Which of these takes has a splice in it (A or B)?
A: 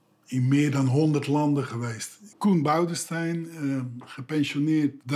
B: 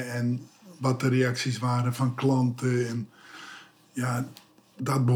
A